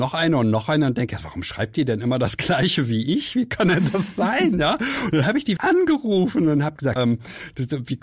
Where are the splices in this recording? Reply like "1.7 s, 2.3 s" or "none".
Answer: 5.6 s, 7.0 s